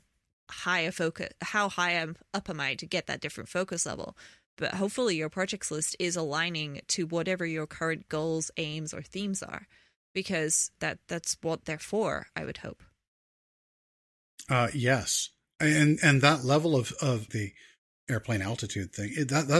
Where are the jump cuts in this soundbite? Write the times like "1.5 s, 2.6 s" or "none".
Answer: 10.8 s, 17.3 s